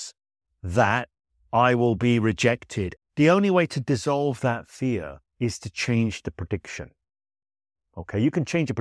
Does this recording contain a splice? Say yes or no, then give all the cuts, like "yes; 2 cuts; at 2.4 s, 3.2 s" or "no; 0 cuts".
yes; 2 cuts; at 3.0 s, 5.3 s